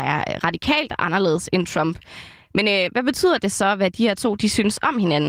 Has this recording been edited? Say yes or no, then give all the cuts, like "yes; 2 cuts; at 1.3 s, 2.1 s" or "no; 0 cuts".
no; 0 cuts